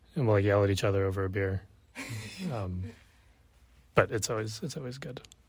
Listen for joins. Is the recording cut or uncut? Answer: uncut